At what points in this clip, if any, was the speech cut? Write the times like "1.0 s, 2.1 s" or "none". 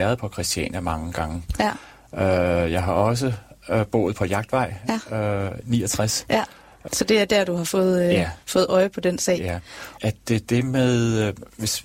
5.6 s, 6.9 s, 10.0 s